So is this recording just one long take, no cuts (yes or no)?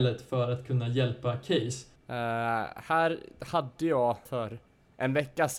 no